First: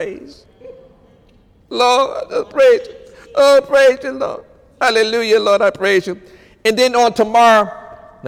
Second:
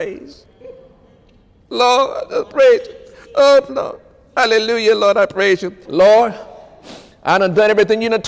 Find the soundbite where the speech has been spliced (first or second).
second